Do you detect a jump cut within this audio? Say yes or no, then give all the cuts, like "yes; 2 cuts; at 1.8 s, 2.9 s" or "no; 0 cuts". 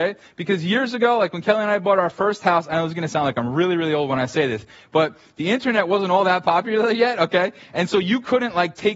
no; 0 cuts